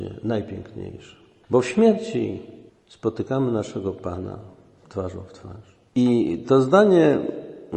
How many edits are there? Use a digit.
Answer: 1